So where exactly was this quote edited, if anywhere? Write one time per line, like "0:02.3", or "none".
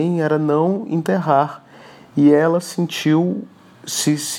none